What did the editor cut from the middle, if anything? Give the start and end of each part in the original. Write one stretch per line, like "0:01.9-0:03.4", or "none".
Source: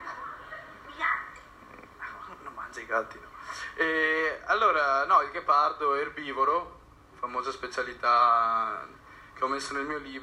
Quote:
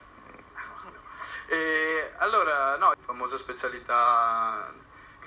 0:02.4-0:03.2
0:05.2-0:07.1